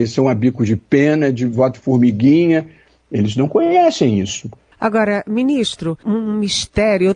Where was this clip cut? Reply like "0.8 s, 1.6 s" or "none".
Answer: 4.7 s, 6.0 s